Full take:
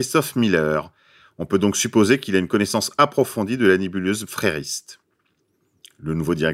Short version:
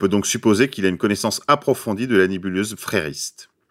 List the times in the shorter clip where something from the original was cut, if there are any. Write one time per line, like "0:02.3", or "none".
none